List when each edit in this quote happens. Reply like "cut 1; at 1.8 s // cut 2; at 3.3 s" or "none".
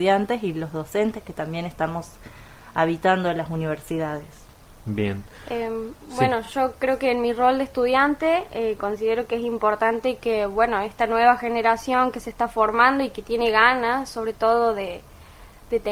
none